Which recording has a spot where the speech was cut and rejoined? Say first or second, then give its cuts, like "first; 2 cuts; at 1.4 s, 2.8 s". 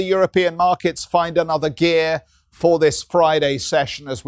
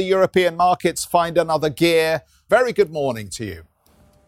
second; 1 cut; at 2.5 s